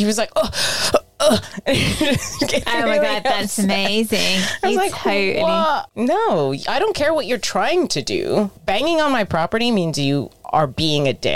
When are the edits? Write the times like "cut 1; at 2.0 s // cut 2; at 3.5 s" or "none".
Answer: none